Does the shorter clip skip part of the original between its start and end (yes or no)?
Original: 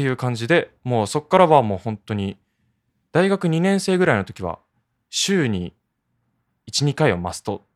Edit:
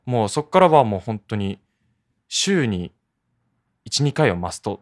yes